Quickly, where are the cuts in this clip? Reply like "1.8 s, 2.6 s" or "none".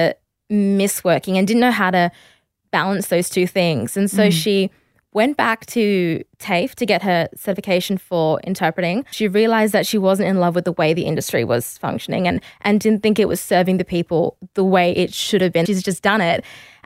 9.1 s, 15.7 s